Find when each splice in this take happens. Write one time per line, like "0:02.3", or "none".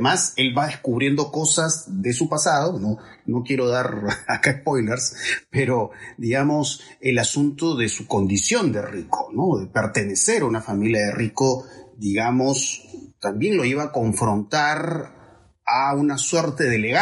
none